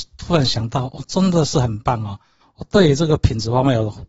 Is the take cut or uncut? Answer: uncut